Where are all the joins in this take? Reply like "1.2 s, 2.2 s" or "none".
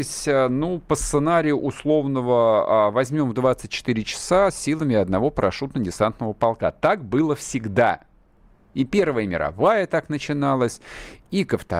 none